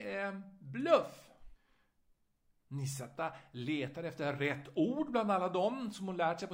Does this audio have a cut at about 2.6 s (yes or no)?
yes